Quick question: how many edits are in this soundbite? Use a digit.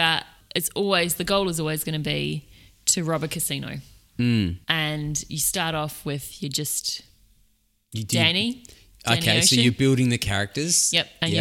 1